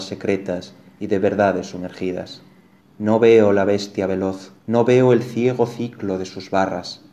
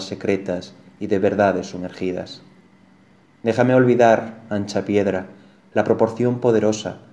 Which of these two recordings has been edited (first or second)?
first